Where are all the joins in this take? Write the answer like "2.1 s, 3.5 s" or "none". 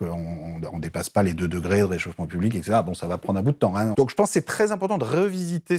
3.9 s